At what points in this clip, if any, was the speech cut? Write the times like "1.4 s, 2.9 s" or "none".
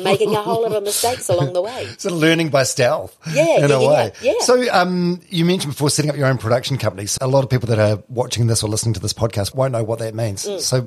7.2 s, 9.5 s